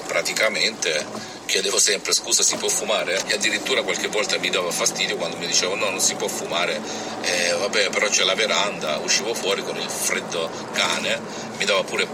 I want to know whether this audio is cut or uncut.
cut